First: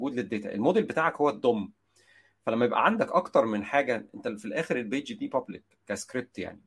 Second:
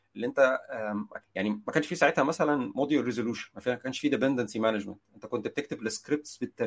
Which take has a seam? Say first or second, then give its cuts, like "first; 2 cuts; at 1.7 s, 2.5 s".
second; 1 cut; at 1.2 s